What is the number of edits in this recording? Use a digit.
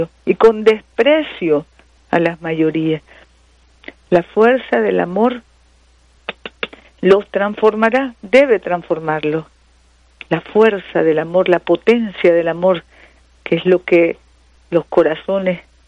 0